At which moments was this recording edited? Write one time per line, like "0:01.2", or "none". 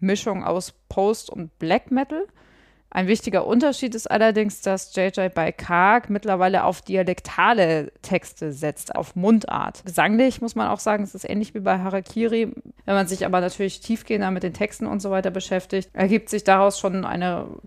0:08.9
0:12.8